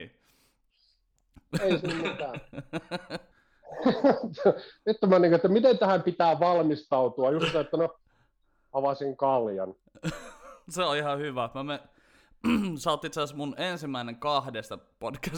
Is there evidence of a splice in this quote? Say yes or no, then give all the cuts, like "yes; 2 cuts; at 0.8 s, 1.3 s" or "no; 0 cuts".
no; 0 cuts